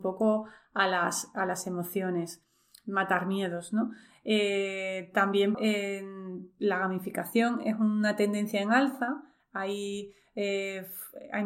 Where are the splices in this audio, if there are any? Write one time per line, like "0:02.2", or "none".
0:05.5